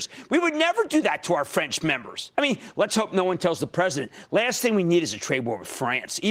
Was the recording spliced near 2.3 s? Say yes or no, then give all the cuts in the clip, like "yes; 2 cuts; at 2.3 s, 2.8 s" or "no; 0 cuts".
yes; 1 cut; at 2.3 s